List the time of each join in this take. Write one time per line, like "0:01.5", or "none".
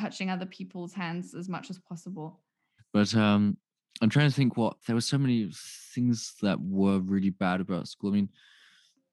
0:02.8
0:04.8